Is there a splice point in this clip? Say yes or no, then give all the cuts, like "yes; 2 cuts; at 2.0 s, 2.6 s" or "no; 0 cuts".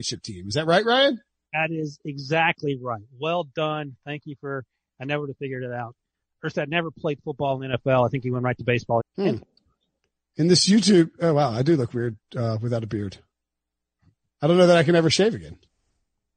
yes; 1 cut; at 9.0 s